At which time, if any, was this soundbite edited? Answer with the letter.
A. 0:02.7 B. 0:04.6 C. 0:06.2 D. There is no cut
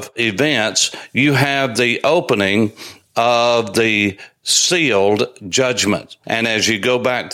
C